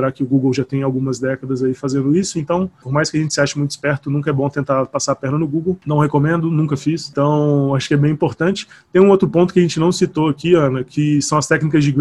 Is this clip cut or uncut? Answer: uncut